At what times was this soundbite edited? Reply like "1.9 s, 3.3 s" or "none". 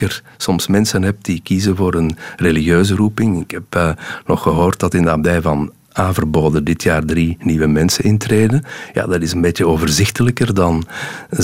none